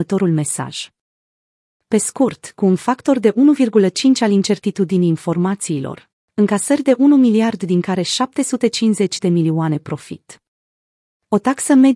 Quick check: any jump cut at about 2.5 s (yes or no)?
no